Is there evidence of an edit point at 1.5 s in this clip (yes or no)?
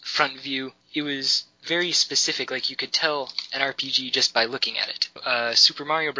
no